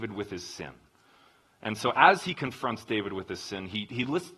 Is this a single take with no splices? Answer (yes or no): yes